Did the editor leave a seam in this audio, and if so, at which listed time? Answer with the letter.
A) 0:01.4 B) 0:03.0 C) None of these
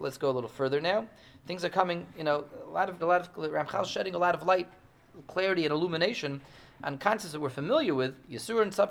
B